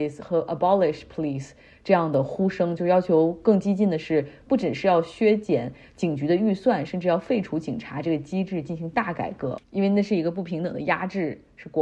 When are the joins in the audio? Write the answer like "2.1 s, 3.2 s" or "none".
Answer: 9.6 s